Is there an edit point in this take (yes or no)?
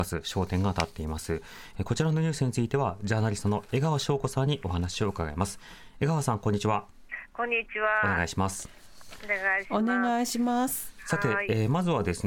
no